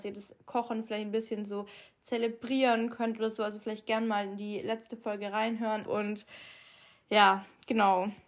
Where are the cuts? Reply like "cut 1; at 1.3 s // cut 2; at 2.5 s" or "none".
cut 1; at 5.9 s